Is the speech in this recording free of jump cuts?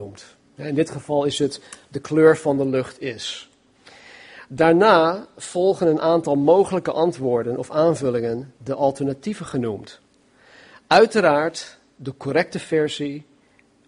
yes; 0 cuts

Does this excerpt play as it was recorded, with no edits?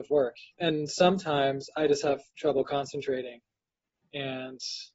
yes; 0 cuts

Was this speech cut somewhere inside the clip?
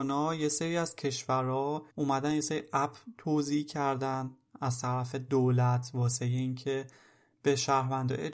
yes; 1 cut; at 1.9 s

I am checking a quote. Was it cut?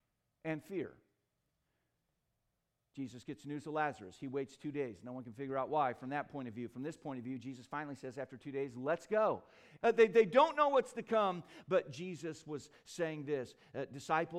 yes; 1 cut; at 9.8 s

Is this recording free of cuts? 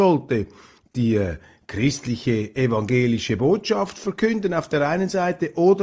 yes; 0 cuts

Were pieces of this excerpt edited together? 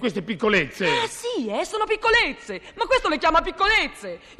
no; 0 cuts

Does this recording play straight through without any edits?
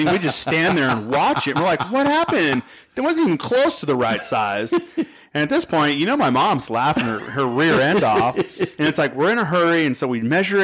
yes; 0 cuts

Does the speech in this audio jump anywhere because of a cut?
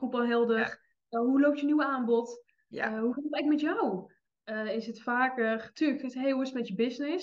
no; 0 cuts

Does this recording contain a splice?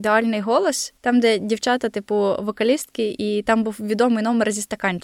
no; 0 cuts

